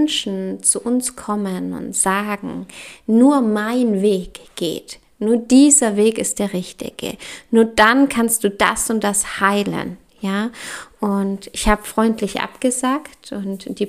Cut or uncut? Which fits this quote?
uncut